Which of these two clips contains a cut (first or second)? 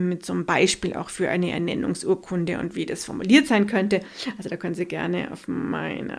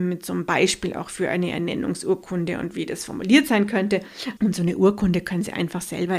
second